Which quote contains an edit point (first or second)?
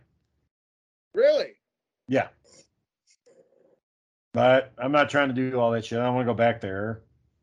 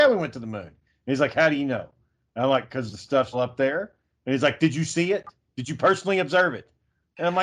second